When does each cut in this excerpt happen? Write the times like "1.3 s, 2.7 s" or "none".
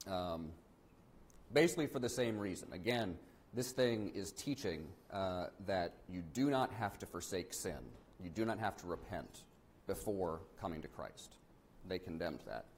5.0 s